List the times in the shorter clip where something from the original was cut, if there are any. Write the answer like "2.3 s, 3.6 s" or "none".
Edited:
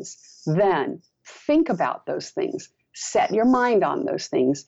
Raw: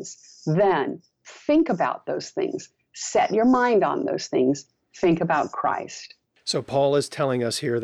none